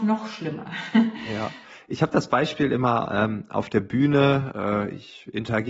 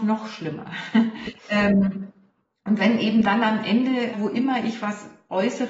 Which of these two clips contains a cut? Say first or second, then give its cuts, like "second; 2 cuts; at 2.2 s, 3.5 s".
second; 2 cuts; at 1.2 s, 4.1 s